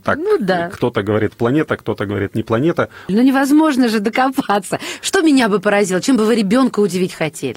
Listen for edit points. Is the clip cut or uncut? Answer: cut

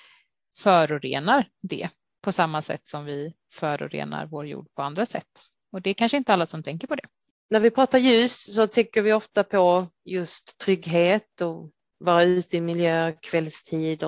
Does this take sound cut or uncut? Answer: uncut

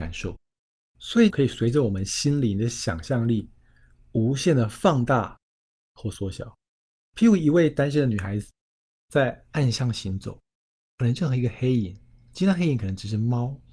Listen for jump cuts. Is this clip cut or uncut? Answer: cut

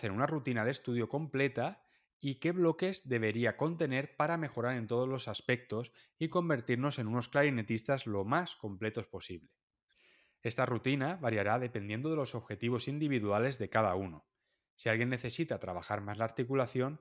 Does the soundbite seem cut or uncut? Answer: uncut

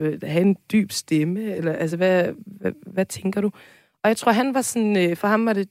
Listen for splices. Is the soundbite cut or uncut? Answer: uncut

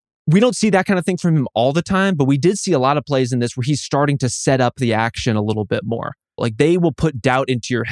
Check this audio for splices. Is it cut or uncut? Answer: cut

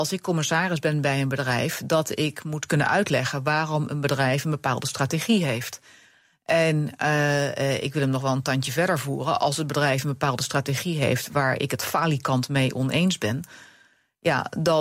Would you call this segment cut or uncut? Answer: uncut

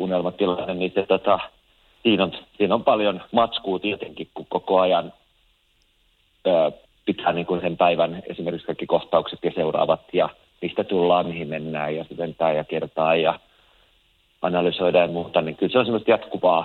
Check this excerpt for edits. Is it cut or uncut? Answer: cut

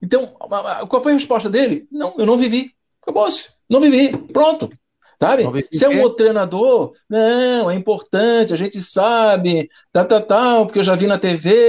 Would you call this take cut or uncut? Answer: cut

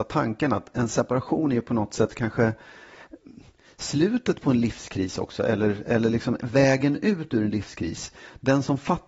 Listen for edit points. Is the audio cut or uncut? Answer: uncut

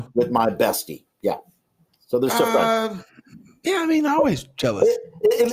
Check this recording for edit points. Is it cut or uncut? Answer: uncut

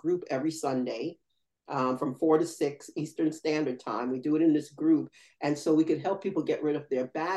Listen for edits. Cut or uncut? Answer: uncut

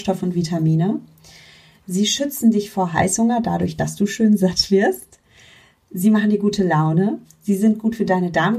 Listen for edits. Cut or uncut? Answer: uncut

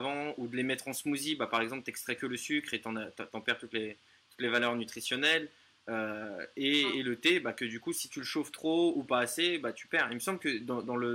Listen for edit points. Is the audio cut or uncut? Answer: uncut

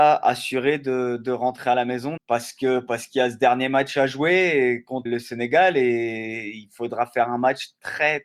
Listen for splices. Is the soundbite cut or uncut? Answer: cut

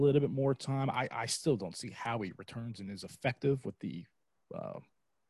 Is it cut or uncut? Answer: uncut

